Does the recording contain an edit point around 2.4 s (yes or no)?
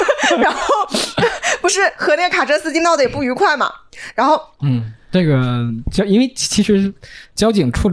no